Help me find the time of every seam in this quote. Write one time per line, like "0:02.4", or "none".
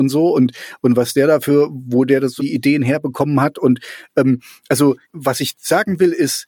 0:02.4
0:05.0

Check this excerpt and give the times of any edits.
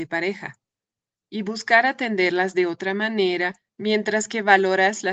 0:03.7

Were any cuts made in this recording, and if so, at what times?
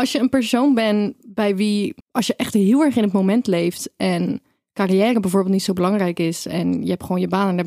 0:02.0

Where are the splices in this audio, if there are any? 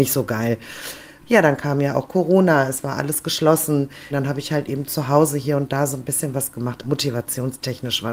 0:01.2
0:04.1
0:06.8

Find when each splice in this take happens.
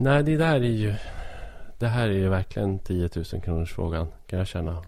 none

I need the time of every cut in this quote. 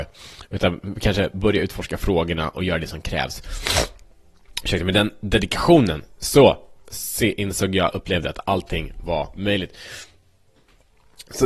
none

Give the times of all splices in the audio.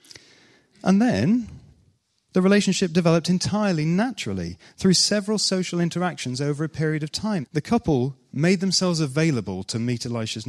0:07.4

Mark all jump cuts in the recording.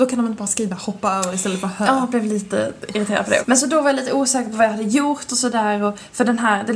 0:03.4

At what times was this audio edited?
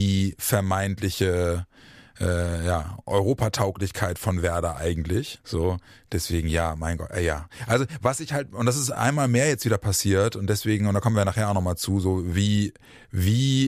0:05.4

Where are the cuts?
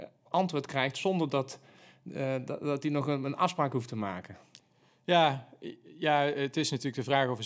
none

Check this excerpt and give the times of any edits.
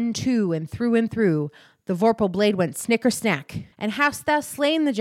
0:03.7

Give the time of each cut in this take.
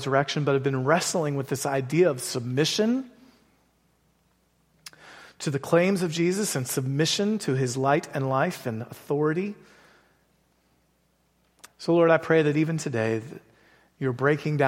0:11.7

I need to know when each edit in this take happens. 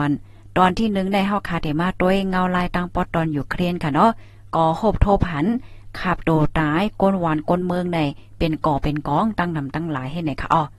none

